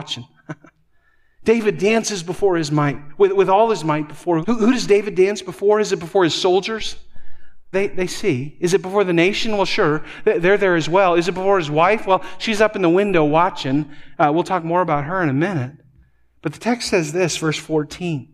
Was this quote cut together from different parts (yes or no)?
yes